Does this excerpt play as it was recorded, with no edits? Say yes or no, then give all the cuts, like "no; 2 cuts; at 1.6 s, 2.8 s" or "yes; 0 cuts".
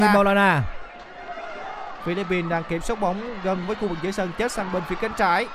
no; 1 cut; at 2.0 s